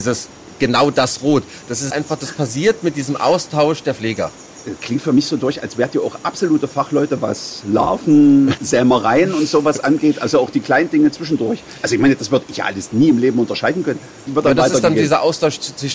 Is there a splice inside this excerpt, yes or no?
yes